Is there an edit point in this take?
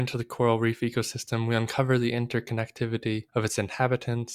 yes; 1 cut; at 3.3 s

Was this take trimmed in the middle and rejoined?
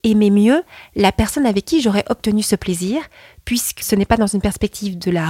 yes; 1 cut; at 3.8 s

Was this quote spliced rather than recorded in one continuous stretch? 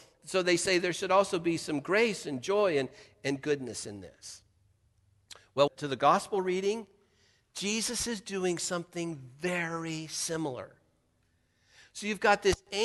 yes; 1 cut; at 5.7 s

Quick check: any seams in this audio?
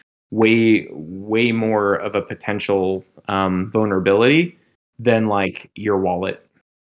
no; 0 cuts

